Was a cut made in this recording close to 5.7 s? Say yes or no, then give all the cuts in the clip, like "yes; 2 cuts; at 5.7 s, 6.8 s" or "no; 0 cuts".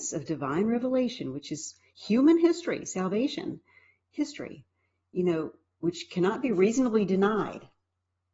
no; 0 cuts